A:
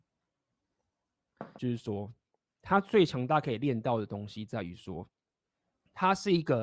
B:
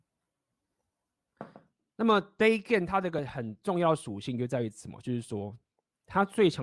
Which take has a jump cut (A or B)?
A